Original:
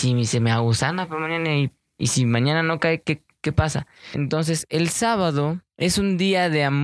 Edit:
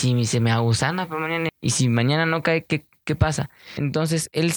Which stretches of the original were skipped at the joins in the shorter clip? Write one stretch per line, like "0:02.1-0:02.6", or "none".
0:01.5-0:01.9